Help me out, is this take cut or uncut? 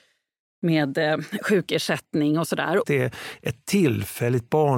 cut